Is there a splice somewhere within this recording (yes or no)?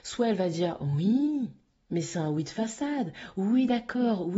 no